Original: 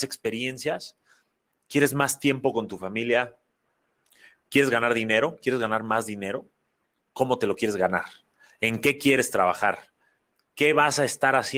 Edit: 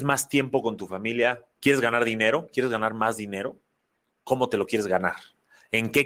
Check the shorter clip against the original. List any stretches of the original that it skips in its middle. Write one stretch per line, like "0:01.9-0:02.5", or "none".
0:03.4-0:04.4

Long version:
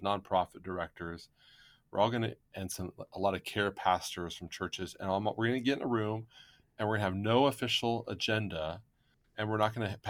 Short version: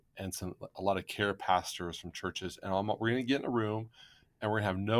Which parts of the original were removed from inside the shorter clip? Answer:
none

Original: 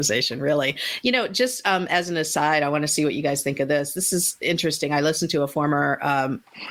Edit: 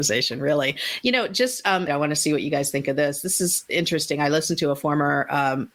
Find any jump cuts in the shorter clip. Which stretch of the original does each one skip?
0:01.9-0:02.6

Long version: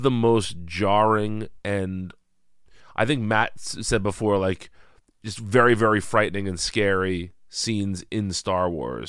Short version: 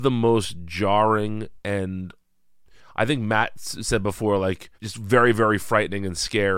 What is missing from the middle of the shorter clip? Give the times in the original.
0:04.7-0:05.2

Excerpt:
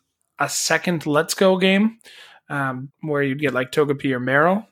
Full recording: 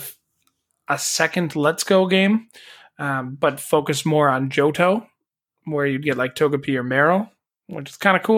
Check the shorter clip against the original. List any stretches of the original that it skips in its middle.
0:03.4-0:05.5

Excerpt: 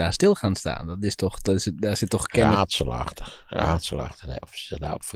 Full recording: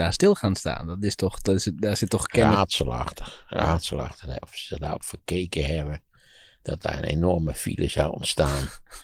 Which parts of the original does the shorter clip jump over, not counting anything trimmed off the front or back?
none

